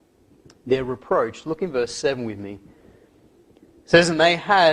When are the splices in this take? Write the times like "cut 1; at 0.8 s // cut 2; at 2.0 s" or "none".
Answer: none